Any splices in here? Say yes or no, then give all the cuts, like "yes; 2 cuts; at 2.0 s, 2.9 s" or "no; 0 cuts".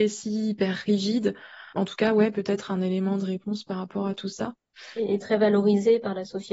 yes; 1 cut; at 1.7 s